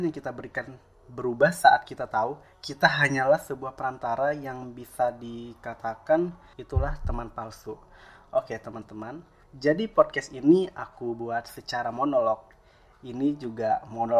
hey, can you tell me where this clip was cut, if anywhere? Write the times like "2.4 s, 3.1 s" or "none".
6.5 s